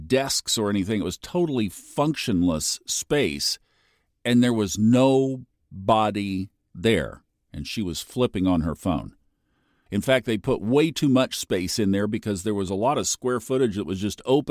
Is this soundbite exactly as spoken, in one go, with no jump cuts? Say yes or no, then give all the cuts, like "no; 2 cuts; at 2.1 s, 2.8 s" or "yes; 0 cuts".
no; 1 cut; at 9.9 s